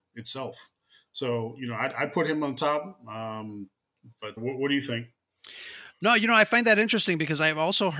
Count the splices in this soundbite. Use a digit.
1